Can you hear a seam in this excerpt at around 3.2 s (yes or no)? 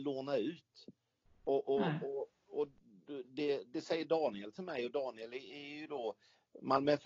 yes